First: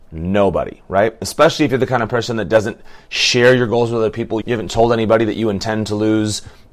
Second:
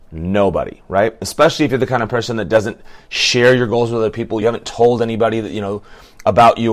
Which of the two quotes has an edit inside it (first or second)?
first